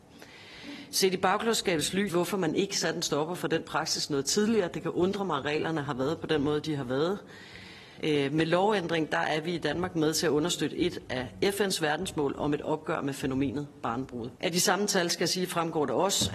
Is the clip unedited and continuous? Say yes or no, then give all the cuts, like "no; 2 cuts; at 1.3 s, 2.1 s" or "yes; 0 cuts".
no; 3 cuts; at 2.1 s, 8.0 s, 14.4 s